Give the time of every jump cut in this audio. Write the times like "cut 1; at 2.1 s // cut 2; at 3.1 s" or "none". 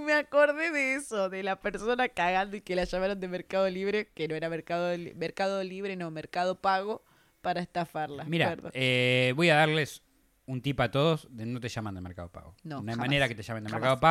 none